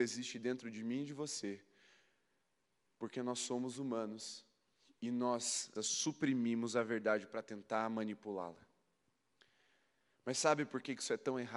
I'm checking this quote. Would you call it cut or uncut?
cut